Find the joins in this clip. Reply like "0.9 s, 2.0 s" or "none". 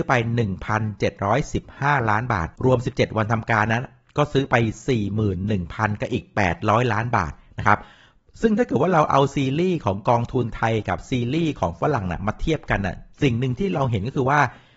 2.5 s, 13.1 s